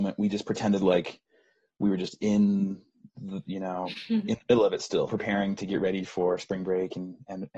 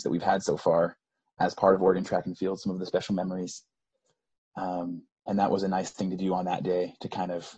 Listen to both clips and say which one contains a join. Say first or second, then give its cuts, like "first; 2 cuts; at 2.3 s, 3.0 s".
first; 1 cut; at 5.1 s